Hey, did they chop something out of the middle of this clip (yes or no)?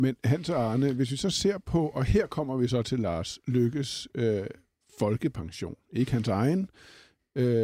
no